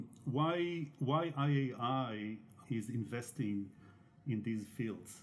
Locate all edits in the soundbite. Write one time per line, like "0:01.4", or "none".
0:02.6